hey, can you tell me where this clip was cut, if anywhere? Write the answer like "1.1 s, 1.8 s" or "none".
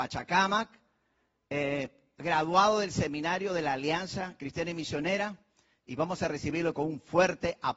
none